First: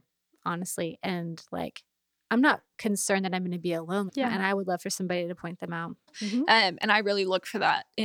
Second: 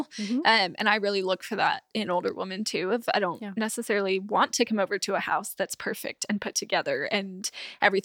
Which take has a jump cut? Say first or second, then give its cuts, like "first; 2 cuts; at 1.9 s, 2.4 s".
first; 2 cuts; at 4.1 s, 6.1 s